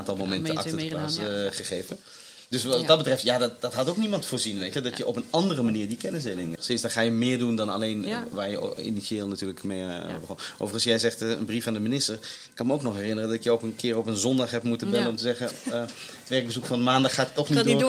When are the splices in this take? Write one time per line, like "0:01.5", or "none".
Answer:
0:06.6